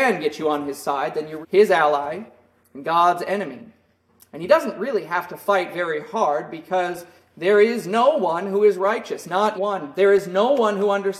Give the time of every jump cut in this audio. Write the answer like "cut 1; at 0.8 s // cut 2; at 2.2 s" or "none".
cut 1; at 1.4 s // cut 2; at 9.5 s